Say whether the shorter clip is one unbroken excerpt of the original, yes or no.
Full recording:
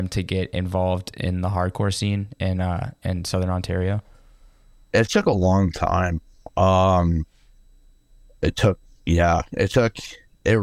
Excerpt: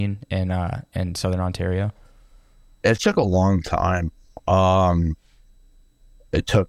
yes